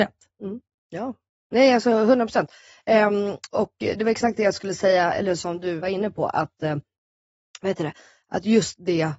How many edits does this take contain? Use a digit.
1